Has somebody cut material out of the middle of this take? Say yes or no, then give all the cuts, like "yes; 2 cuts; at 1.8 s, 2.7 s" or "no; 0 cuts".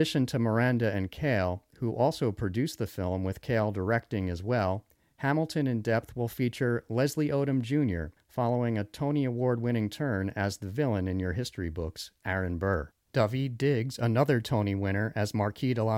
no; 0 cuts